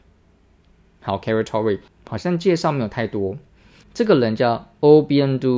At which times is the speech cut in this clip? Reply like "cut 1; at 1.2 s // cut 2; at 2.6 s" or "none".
cut 1; at 1.9 s // cut 2; at 3.8 s